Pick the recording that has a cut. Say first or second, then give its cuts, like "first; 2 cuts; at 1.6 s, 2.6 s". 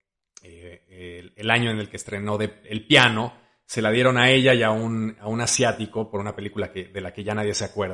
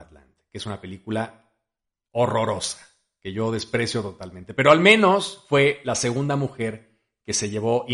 first; 1 cut; at 2.6 s